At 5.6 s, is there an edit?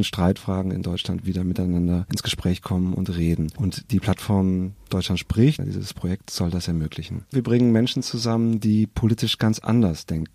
yes; 2 cuts; at 5.6 s, 7.3 s

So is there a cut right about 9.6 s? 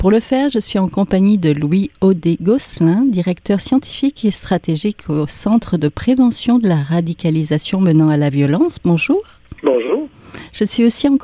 yes; 1 cut; at 9.6 s

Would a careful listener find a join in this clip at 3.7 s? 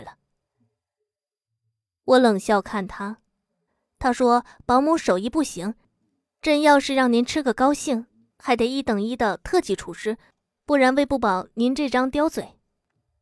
yes; 1 cut; at 3.7 s

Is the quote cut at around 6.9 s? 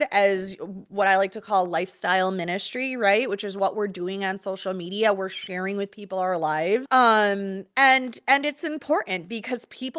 yes; 1 cut; at 6.9 s

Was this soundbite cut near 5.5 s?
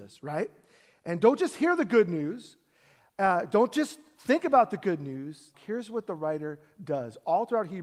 yes; 1 cut; at 5.5 s

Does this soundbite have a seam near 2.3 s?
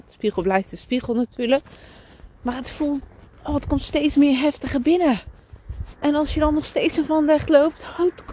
no; 1 cut; at 6.0 s

